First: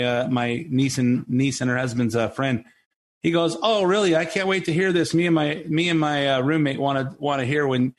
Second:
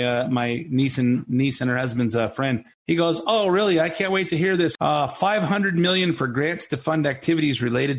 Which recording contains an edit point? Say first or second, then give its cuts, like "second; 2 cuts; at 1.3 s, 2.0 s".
second; 2 cuts; at 2.7 s, 4.8 s